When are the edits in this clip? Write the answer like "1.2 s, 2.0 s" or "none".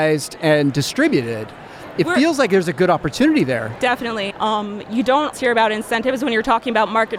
4.3 s, 5.3 s